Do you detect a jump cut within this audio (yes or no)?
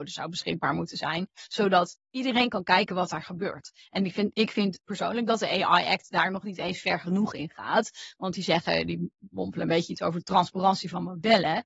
yes